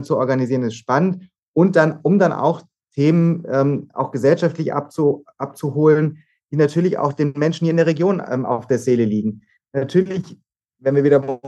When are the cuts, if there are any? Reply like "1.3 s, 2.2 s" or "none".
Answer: none

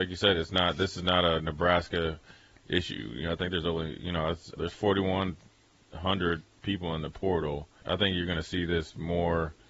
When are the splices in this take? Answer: 4.6 s, 7.8 s

